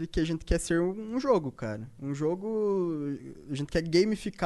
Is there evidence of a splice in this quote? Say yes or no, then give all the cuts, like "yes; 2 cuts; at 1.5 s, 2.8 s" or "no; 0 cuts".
no; 0 cuts